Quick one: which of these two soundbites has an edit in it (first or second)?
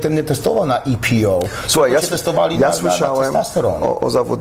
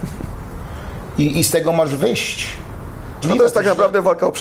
second